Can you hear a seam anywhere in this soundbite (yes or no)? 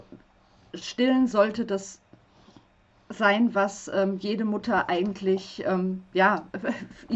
no